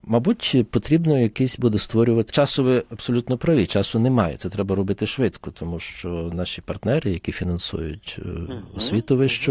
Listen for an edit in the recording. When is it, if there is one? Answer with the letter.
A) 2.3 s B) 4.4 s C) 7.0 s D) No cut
A